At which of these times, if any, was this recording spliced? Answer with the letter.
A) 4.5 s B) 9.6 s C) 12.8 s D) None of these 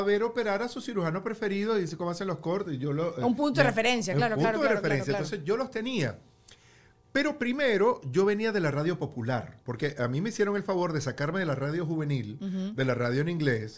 B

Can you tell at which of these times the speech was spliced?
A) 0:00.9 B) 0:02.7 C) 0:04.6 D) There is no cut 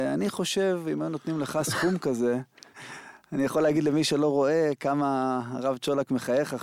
B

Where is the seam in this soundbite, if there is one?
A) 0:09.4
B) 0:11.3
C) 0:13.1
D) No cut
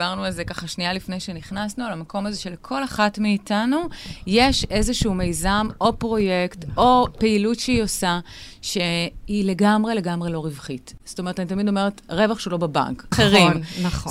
C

